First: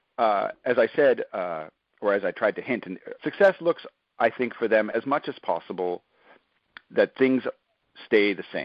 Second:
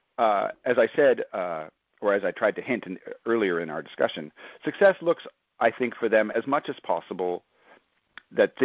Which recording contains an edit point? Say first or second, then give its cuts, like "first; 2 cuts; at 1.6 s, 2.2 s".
first; 1 cut; at 3.2 s